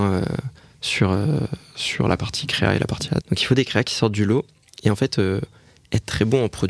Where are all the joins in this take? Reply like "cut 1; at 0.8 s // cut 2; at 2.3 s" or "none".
cut 1; at 3.2 s

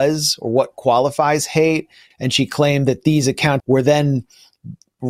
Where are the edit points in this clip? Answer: cut 1; at 2.1 s // cut 2; at 3.6 s

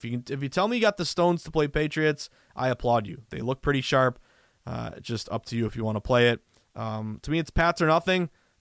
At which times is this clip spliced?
none

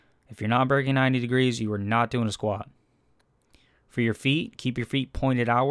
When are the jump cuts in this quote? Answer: none

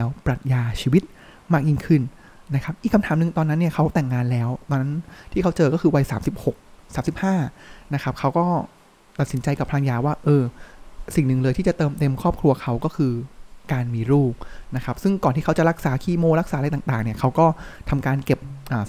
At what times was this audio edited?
none

